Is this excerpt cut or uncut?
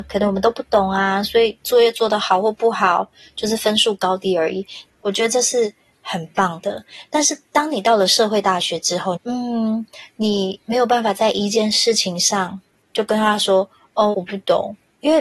cut